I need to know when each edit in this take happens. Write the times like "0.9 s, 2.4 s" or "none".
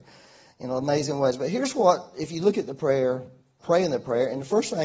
3.6 s